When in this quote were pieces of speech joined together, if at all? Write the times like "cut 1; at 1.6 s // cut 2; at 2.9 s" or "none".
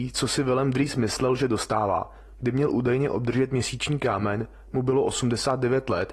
cut 1; at 2.3 s